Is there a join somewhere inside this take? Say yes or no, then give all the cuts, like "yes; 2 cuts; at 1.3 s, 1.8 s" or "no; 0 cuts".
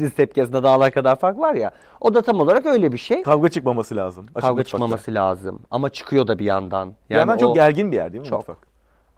no; 0 cuts